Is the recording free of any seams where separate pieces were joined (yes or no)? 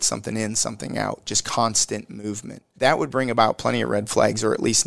no